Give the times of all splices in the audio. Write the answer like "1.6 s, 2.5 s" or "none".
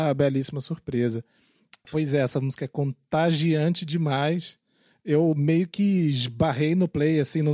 1.8 s